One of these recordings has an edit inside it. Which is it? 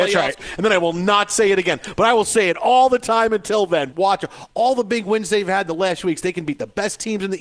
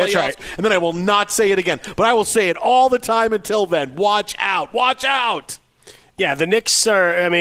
first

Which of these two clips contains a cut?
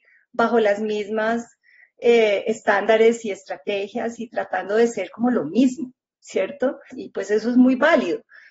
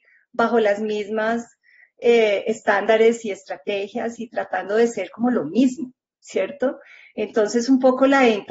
first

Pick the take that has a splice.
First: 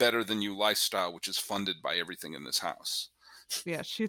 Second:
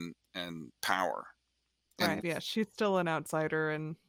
second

